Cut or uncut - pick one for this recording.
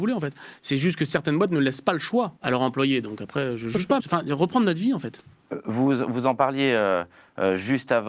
cut